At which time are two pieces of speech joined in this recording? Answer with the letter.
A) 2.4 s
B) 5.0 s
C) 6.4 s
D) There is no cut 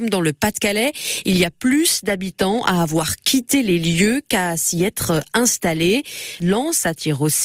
C